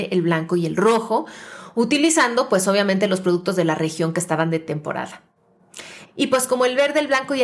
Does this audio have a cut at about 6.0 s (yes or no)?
yes